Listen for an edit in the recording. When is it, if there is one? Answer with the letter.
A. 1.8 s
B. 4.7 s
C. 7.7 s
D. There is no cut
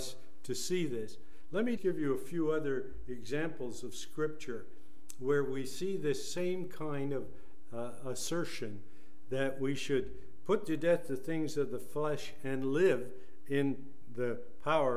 A